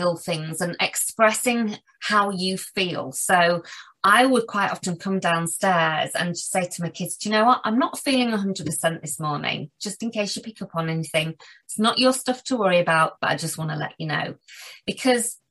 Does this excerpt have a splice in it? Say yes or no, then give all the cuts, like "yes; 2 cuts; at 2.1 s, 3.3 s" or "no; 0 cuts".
yes; 1 cut; at 13.2 s